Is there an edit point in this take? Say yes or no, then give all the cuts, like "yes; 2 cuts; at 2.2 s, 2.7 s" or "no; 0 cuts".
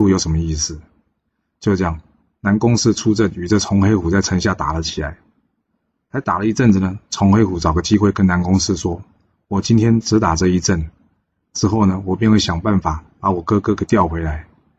no; 0 cuts